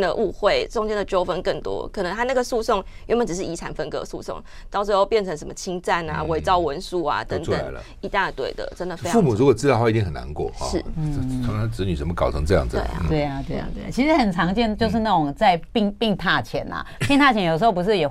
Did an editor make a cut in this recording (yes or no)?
no